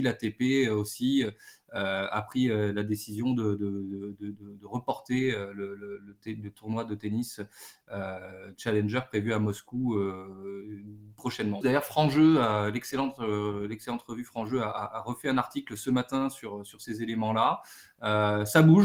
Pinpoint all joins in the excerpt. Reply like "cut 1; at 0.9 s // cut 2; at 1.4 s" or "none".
cut 1; at 11.6 s